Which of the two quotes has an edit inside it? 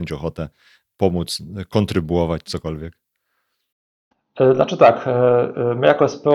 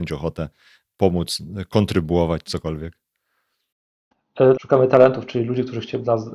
second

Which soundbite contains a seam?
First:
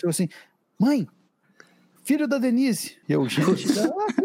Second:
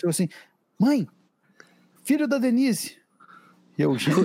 first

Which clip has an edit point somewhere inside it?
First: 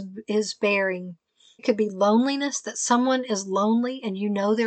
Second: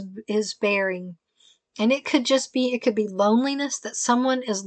first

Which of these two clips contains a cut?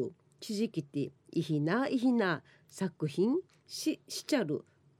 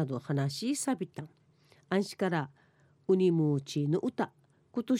first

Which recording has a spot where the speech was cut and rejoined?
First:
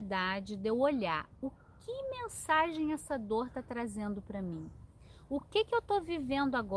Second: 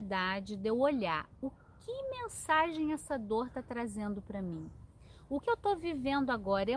second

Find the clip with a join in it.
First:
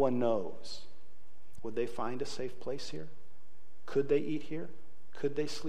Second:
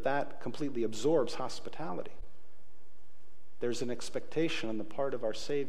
first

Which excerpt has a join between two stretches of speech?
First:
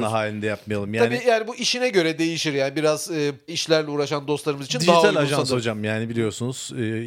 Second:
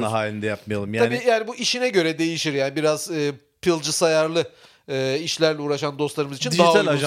first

